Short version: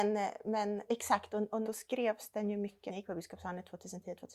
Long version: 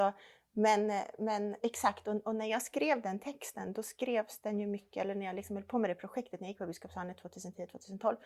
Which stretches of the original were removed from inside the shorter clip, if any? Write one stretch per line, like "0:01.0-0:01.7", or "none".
0:02.4-0:03.7
0:05.0-0:06.4